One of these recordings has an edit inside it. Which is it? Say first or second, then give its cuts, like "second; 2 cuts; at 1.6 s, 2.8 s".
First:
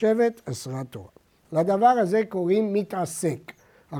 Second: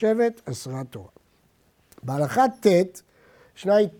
first; 1 cut; at 1.4 s